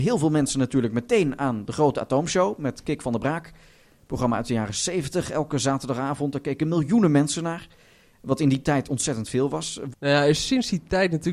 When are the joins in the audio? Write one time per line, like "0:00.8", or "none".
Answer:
0:09.9